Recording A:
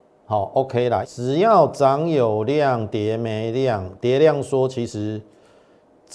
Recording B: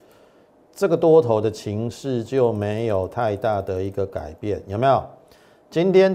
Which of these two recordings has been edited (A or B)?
A